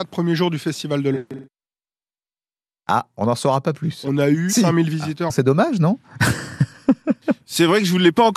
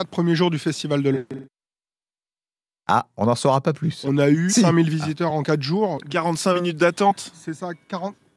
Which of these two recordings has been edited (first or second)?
first